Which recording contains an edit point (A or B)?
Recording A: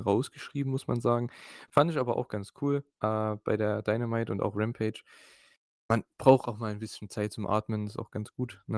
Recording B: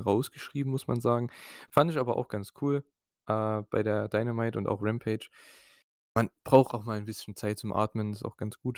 A